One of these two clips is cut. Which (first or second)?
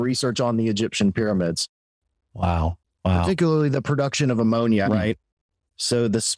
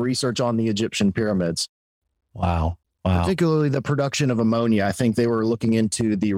first